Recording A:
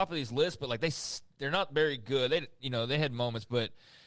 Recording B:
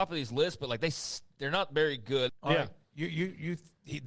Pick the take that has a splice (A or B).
B